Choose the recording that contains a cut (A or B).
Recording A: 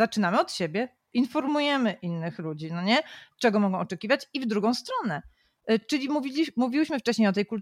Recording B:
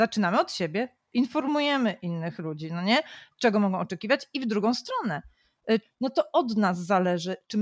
B